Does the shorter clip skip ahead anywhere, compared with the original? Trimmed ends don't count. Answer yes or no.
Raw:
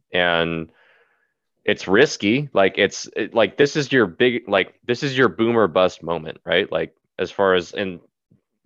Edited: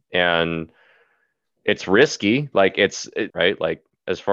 yes